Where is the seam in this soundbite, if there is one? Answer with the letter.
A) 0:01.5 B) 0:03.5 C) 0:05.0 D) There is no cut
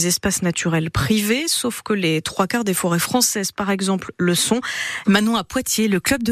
C